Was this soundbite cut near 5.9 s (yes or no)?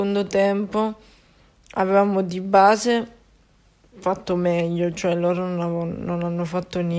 no